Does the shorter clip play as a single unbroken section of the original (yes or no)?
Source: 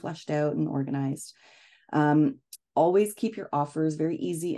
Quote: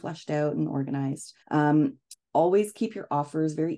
no